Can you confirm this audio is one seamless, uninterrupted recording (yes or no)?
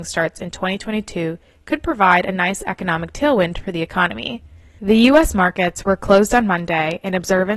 no